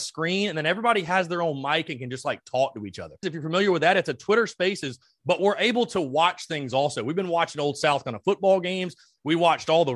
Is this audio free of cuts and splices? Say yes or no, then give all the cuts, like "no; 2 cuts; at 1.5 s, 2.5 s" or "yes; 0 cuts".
no; 1 cut; at 3.2 s